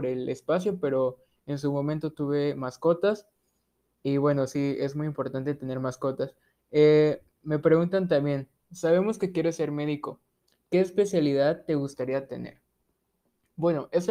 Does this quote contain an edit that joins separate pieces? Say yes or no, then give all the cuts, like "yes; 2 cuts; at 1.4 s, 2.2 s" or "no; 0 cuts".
no; 0 cuts